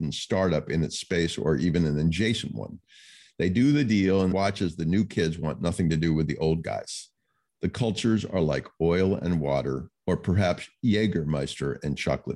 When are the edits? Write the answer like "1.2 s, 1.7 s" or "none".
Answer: 4.3 s